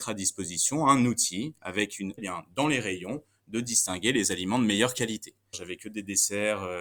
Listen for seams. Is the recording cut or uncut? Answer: cut